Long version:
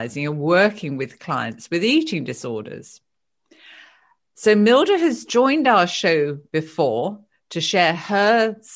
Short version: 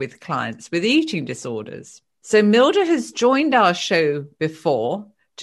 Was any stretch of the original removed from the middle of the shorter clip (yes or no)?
yes